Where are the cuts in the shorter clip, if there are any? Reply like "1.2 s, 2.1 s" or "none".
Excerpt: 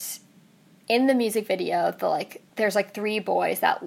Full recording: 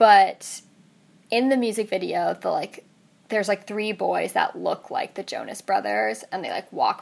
2.5 s